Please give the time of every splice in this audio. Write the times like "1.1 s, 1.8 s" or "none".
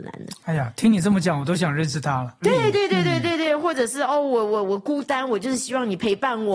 2.4 s